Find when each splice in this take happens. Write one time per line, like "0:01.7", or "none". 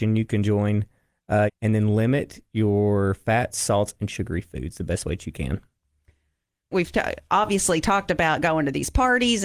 0:01.5
0:06.7